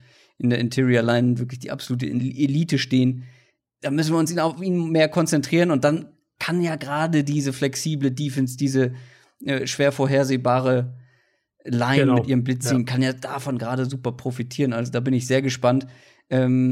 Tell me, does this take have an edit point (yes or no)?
no